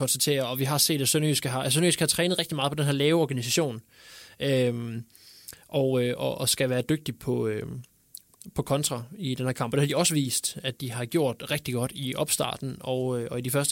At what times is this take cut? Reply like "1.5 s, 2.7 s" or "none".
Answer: none